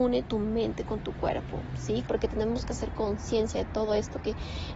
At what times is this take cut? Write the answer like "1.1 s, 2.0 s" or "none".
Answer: 2.1 s